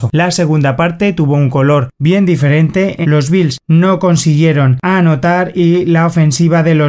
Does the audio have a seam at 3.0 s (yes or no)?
yes